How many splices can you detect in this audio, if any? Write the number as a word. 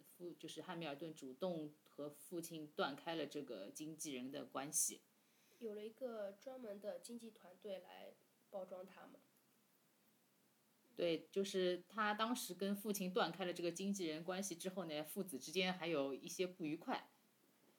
zero